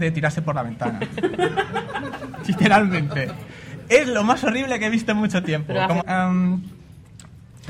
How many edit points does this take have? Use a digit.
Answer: 1